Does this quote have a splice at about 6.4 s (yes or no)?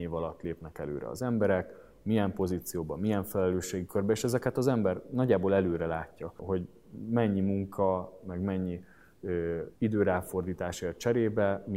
yes